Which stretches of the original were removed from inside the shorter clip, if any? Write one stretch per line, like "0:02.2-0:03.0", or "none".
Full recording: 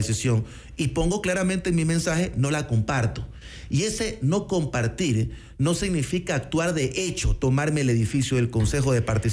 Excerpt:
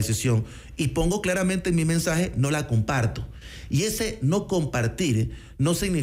none